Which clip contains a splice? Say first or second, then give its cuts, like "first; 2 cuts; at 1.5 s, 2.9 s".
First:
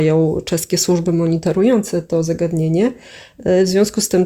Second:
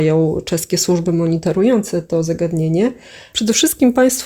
second; 1 cut; at 3.3 s